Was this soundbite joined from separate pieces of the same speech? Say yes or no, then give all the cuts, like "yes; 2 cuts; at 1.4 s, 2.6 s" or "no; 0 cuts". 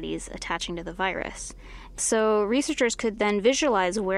no; 0 cuts